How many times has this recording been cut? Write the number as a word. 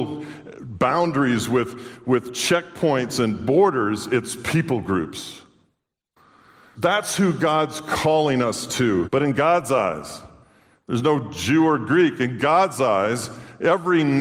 two